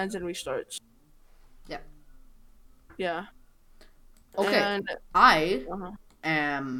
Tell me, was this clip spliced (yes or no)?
no